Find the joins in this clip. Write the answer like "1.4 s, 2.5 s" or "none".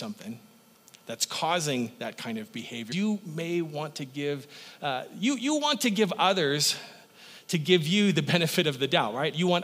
2.9 s